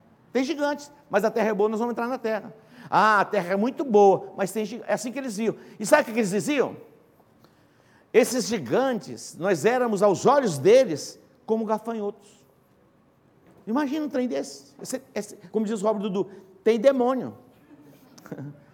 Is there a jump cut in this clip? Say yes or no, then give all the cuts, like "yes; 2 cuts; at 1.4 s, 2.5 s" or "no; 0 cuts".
no; 0 cuts